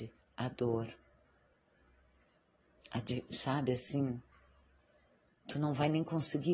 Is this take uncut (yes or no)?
no